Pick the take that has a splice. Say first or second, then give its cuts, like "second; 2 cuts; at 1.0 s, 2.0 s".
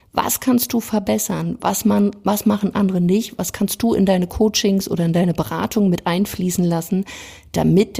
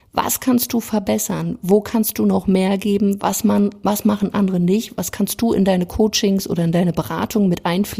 first; 1 cut; at 1.6 s